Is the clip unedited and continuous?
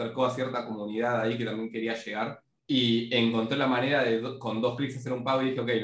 no; 1 cut; at 2.6 s

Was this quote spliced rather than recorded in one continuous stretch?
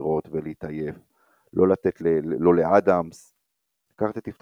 yes; 1 cut; at 2.0 s

